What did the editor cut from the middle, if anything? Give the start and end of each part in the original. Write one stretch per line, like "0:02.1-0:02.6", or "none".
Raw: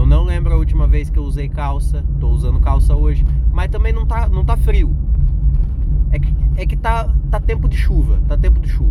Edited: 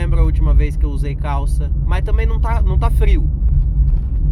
0:02.2-0:03.5

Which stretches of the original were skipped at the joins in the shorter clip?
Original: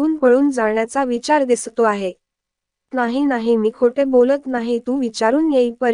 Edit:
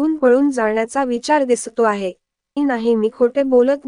0:02.6-0:03.2

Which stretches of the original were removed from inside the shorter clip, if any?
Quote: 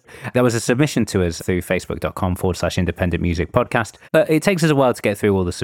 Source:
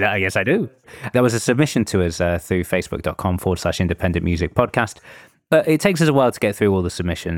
0:02.2-0:02.4
0:05.1-0:05.4

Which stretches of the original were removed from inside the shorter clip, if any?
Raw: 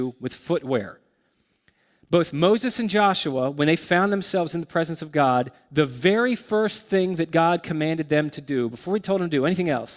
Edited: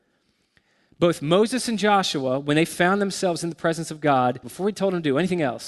0:05.5-0:08.7

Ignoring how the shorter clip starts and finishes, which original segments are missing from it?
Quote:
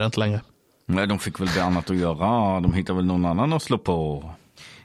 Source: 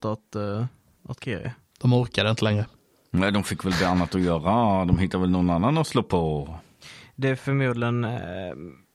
none

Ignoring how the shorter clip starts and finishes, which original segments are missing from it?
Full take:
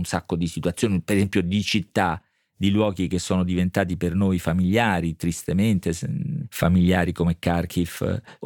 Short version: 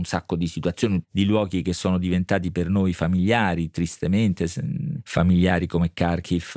0:01.0-0:02.5

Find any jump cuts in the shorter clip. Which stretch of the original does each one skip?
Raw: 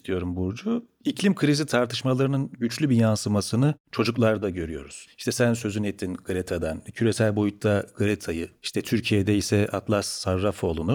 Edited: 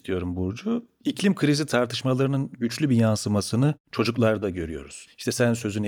none

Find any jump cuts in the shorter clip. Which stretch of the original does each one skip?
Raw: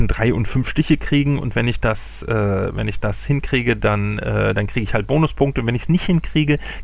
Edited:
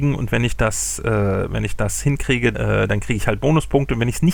0:03.8-0:04.2

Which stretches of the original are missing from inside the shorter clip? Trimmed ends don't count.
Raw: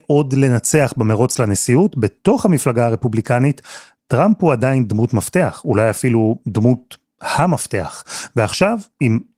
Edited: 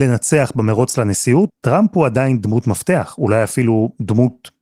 0:01.9-0:04.0

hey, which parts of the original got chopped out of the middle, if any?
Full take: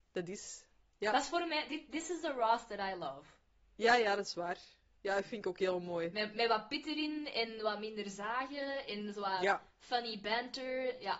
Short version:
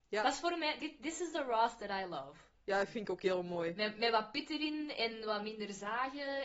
0:03.4-0:04.9

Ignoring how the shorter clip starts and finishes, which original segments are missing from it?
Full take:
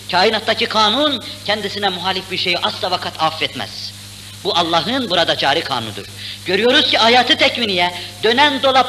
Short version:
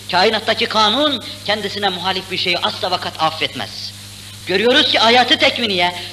0:04.4-0:06.4

